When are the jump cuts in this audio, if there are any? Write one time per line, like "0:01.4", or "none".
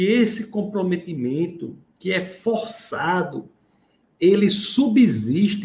none